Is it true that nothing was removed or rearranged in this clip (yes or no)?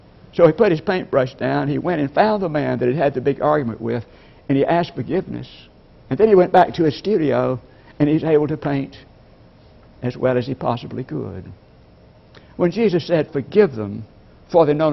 no